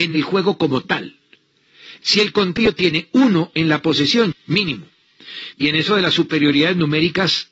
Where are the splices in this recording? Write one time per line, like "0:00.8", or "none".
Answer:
0:02.0
0:04.3
0:05.5